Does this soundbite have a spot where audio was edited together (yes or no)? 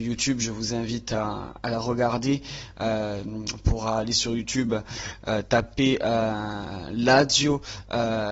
no